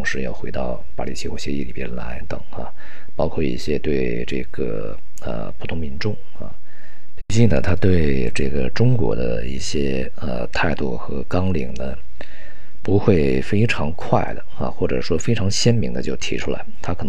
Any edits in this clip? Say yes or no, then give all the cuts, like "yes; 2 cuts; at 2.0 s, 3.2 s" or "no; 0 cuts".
yes; 2 cuts; at 2.2 s, 7.2 s